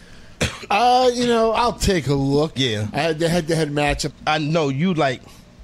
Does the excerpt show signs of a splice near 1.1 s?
no; 2 cuts; at 2.6 s, 4.1 s

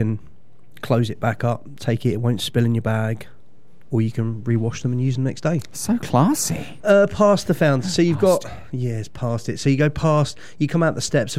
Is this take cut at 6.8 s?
yes; 1 cut; at 6.8 s

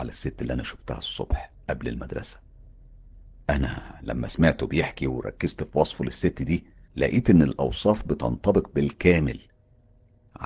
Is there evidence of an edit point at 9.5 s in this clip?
no; 1 cut; at 6.9 s

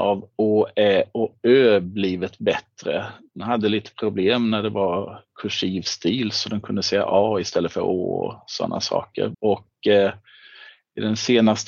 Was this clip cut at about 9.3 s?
yes; 1 cut; at 9.3 s

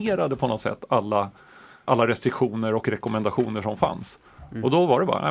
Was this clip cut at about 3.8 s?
no; 1 cut; at 1.8 s

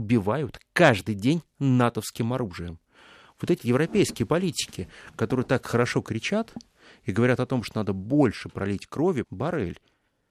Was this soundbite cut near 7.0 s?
no; 2 cuts; at 3.6 s, 9.2 s

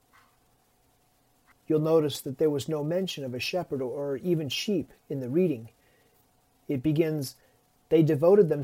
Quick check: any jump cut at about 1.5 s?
yes; 1 cut; at 1.5 s

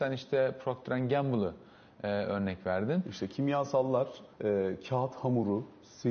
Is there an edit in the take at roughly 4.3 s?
yes; 1 cut; at 4.3 s

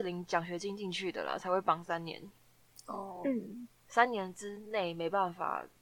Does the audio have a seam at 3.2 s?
no; 0 cuts

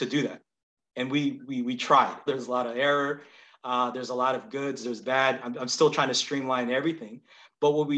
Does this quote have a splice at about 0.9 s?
no; 1 cut; at 2.3 s

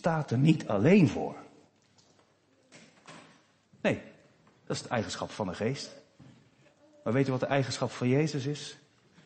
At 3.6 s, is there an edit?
yes; 1 cut; at 3.6 s

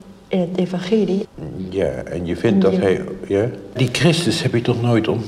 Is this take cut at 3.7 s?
yes; 2 cuts; at 1.2 s, 3.7 s

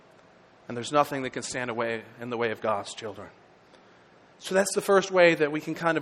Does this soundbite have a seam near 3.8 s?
no; 0 cuts

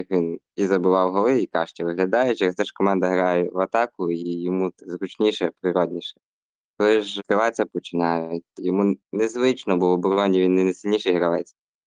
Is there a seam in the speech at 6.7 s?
no; 1 cut; at 9.0 s

